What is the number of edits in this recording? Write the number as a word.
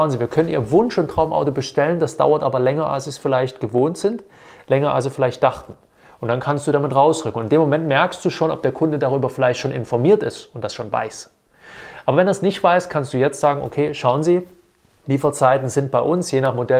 zero